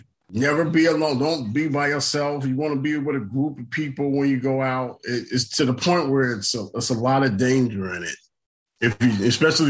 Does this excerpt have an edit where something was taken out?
no; 0 cuts

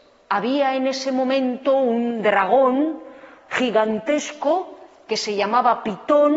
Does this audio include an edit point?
yes; 1 cut; at 3.4 s

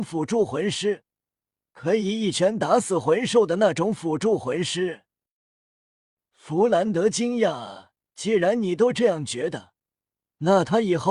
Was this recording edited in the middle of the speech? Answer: no; 0 cuts

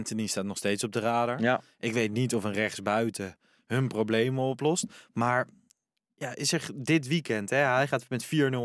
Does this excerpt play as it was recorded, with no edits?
yes; 0 cuts

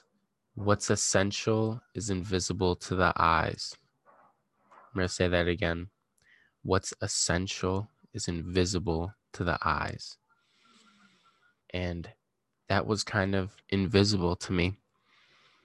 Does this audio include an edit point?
yes; 2 cuts; at 11.6 s, 13.6 s

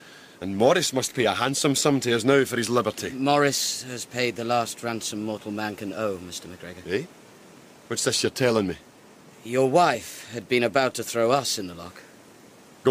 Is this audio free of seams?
yes; 0 cuts

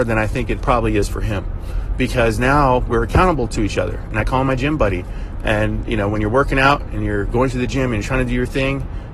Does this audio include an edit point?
no; 0 cuts

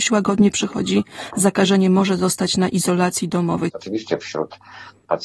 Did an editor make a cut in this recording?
yes; 1 cut; at 3.7 s

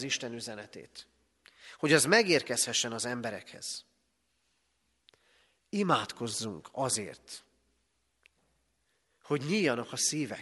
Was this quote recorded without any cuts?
yes; 0 cuts

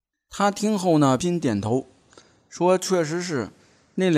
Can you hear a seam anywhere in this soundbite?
yes; 1 cut; at 1.2 s

